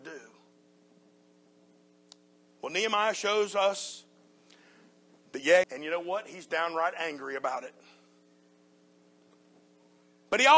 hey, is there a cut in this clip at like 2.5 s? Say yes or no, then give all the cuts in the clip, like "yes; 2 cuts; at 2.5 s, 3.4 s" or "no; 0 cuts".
no; 1 cut; at 5.6 s